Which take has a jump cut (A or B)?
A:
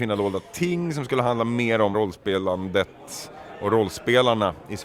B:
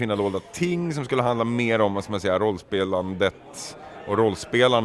A